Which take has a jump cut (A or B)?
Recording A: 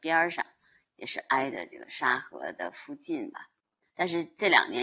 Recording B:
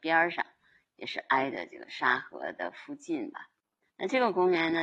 A